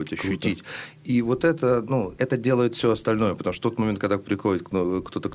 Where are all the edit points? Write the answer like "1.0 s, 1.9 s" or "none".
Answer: none